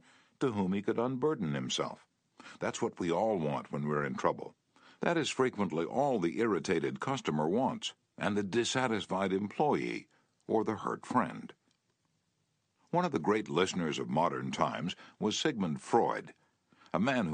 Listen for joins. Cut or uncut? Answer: uncut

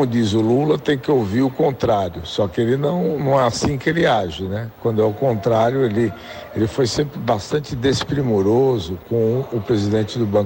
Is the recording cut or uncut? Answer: uncut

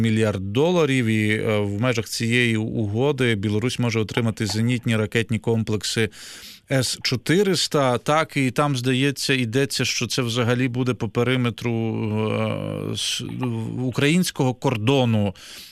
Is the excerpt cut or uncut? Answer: uncut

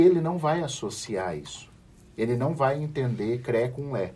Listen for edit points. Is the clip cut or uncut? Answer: uncut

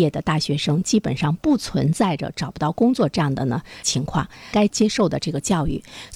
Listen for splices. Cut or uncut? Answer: cut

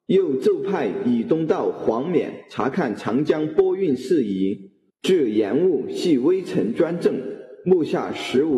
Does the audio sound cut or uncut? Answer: cut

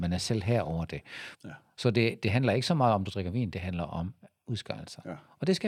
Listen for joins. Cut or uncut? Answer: cut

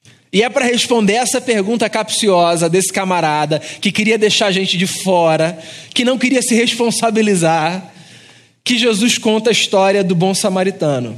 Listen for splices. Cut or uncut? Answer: uncut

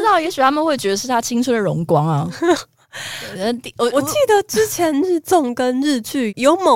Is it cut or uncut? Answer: uncut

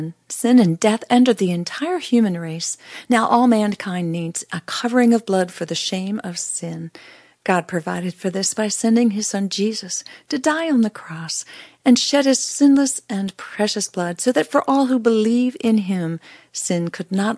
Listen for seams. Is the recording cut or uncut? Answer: uncut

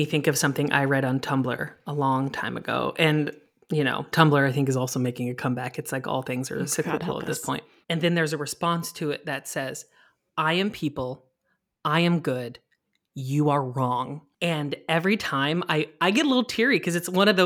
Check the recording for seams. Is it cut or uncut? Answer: cut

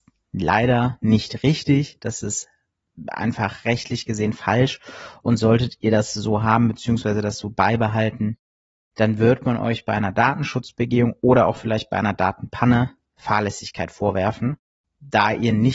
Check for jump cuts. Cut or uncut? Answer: uncut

